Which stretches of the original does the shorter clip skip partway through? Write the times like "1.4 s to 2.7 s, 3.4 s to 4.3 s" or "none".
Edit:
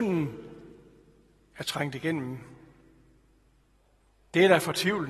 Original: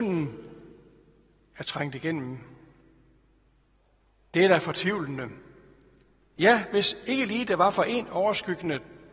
none